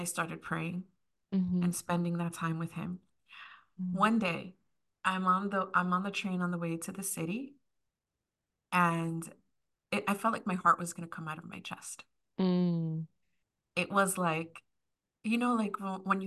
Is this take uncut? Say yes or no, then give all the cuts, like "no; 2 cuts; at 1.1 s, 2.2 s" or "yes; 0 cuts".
yes; 0 cuts